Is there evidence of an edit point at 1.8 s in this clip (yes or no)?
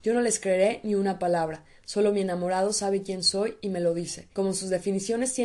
no